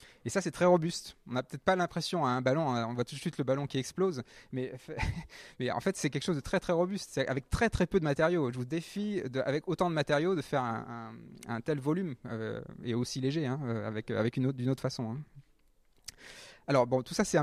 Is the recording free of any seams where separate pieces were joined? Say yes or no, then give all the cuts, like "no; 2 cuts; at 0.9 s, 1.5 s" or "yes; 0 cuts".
yes; 0 cuts